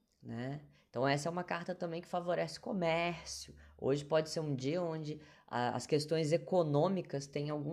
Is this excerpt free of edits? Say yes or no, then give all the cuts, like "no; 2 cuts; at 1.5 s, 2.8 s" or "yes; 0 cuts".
yes; 0 cuts